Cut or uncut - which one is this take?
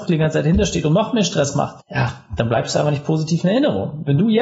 uncut